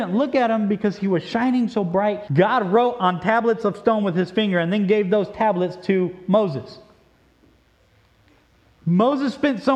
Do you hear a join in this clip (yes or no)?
yes